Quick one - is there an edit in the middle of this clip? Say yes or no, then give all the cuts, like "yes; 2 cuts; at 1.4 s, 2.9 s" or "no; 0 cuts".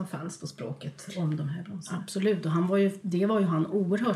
no; 0 cuts